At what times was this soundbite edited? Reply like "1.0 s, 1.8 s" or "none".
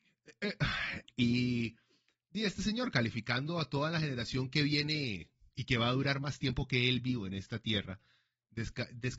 1.0 s